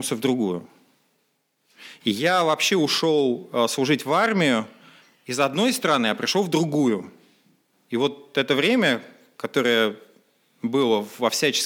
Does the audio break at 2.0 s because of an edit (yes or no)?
yes